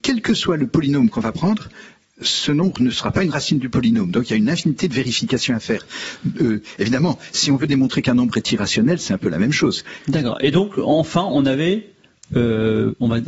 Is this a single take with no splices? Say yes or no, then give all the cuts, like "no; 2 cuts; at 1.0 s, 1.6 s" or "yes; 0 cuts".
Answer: no; 1 cut; at 10.0 s